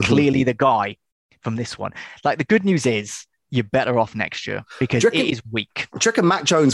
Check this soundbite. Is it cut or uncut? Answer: cut